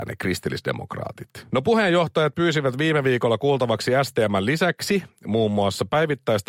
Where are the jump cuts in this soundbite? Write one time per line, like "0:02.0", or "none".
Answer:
0:01.5